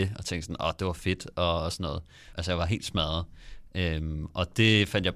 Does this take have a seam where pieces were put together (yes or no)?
yes